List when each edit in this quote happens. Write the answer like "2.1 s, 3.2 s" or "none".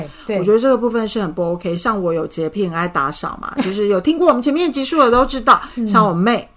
none